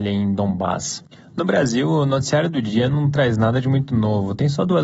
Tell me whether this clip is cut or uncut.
uncut